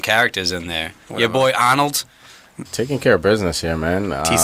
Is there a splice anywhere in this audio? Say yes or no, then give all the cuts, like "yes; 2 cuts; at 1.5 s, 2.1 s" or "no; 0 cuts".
yes; 1 cut; at 2.7 s